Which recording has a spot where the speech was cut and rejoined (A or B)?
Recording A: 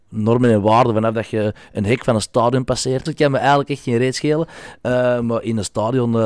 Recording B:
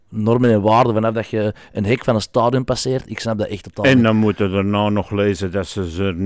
A